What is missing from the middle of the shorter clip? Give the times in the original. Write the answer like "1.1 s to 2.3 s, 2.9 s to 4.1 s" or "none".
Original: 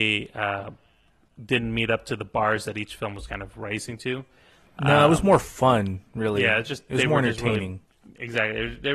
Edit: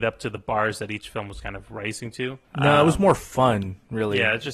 4.3 s to 4.7 s